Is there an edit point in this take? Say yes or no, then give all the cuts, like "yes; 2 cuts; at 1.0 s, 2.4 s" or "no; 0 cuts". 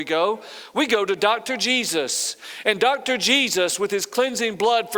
no; 0 cuts